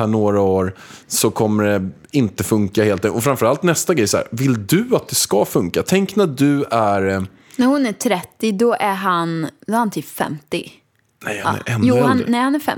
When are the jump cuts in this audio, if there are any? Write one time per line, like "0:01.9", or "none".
none

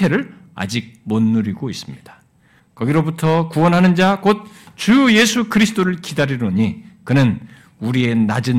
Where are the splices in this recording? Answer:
0:02.6

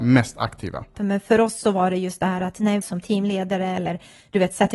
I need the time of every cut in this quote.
0:00.9
0:02.8

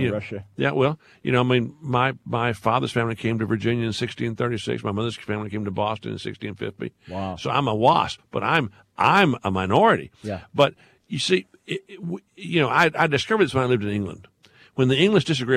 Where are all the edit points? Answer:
none

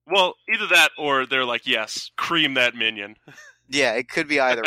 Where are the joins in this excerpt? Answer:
0:02.1

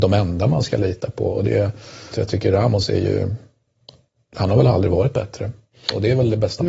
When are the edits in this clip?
0:02.1

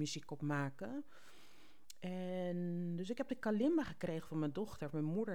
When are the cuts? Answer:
none

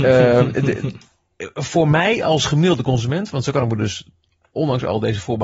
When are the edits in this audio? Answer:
none

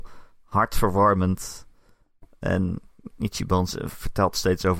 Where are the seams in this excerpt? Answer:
none

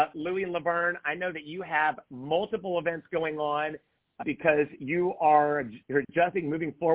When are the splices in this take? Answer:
0:04.2
0:05.8

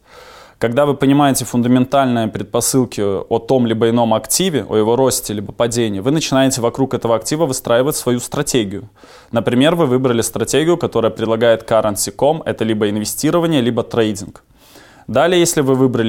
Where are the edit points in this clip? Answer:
none

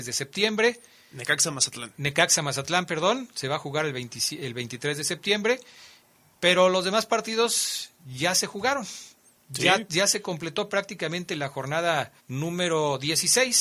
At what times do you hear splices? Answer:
0:12.2

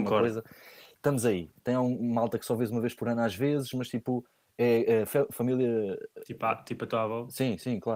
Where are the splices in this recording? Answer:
0:01.6

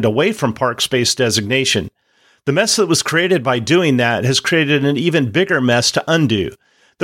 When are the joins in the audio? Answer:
none

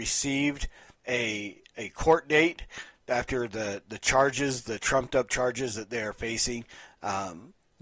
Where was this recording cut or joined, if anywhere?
none

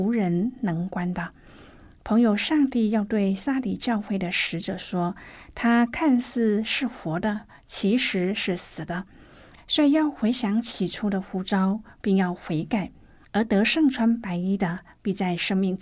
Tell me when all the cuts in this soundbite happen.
0:09.6

